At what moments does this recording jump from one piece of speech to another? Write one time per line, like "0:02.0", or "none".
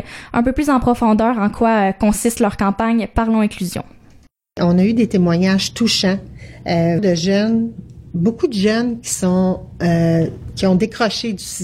0:07.0